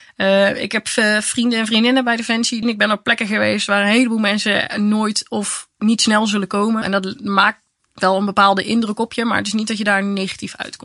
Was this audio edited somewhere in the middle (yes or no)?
yes